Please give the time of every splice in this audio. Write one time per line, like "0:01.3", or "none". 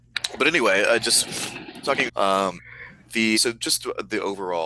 0:02.1
0:03.3